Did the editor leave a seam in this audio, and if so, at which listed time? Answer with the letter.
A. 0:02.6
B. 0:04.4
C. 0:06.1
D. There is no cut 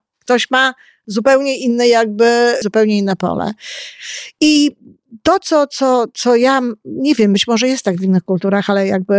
A